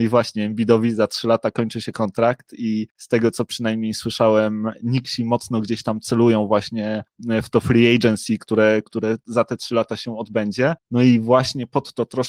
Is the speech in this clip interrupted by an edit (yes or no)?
no